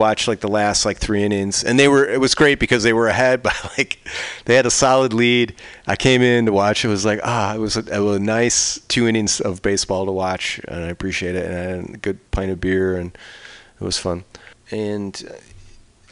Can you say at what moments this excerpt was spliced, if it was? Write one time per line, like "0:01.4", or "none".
0:12.3
0:14.5